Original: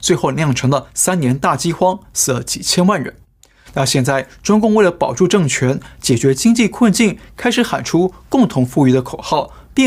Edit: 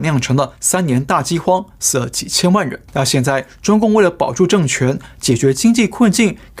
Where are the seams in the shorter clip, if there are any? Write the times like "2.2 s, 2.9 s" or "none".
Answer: 2.9 s